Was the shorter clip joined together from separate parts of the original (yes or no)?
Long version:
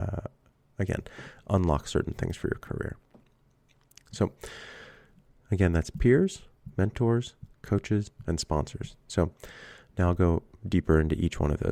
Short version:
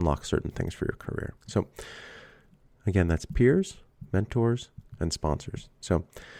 yes